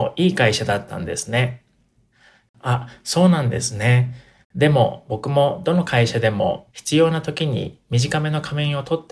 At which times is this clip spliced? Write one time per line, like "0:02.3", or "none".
0:04.4

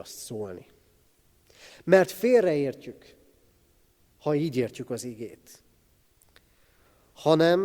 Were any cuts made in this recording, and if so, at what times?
0:01.7

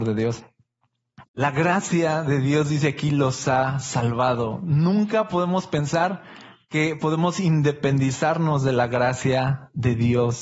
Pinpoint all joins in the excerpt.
0:01.2

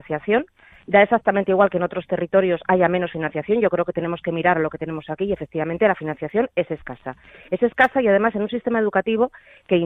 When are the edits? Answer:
none

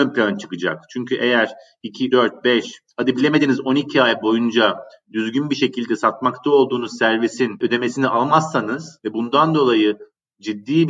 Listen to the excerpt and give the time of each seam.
0:02.1

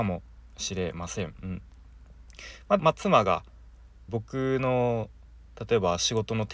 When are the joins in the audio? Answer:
0:02.8
0:04.1

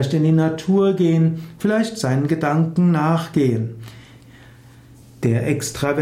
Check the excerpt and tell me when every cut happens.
0:05.0

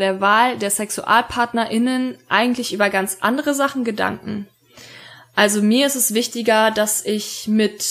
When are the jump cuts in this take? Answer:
none

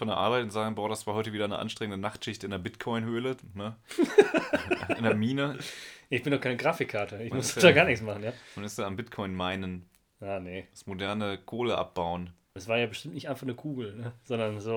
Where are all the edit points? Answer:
0:12.6

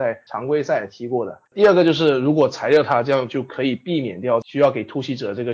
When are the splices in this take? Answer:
none

